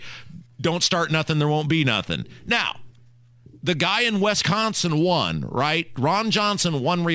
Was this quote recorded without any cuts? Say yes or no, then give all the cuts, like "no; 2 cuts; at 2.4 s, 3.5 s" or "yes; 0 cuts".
yes; 0 cuts